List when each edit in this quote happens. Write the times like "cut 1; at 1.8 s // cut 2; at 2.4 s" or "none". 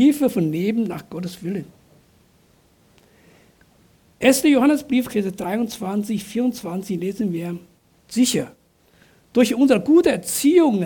cut 1; at 5.1 s // cut 2; at 8.0 s

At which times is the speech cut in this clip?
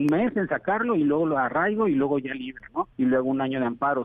cut 1; at 2.9 s

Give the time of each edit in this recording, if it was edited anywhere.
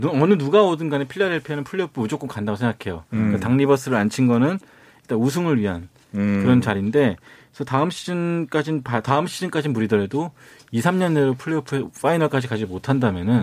none

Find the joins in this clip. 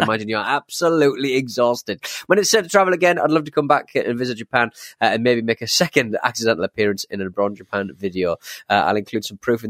none

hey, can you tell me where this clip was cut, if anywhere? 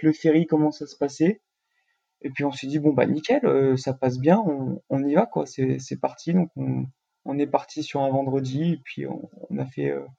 none

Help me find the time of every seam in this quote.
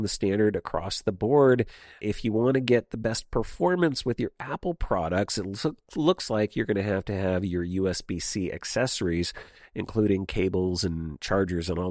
cut 1; at 2.0 s

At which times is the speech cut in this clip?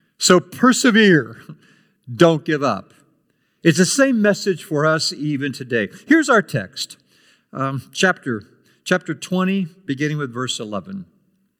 none

